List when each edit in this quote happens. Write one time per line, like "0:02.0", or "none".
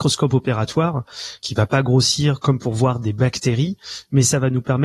0:01.4
0:02.4